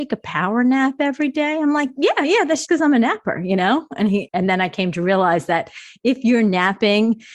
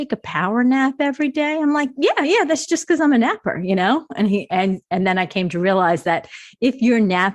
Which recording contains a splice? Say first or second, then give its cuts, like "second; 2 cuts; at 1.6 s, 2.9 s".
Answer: first; 2 cuts; at 2.7 s, 4.3 s